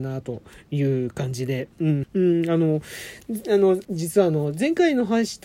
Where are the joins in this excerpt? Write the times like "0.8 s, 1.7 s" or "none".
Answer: 2.0 s, 3.8 s